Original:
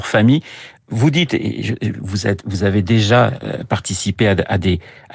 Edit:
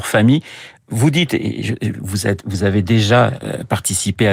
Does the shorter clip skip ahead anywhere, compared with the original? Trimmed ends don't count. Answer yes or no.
no